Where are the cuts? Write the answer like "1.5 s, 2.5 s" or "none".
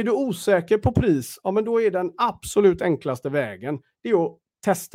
none